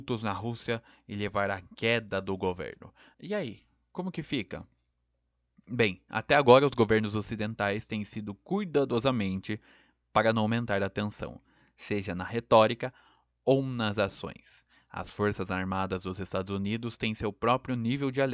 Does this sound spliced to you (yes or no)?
yes